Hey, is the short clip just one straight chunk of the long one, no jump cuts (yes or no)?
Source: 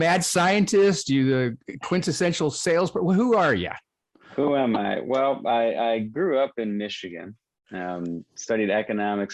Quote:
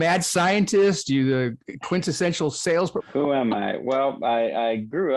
no